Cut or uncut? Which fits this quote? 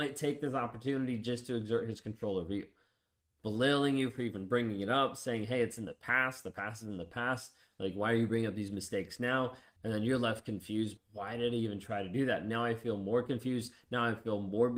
cut